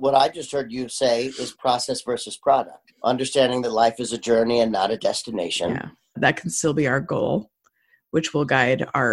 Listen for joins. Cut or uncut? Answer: cut